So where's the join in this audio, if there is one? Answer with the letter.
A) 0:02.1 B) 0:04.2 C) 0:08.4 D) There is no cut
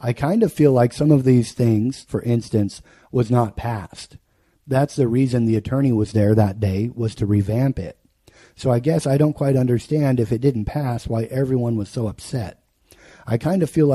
A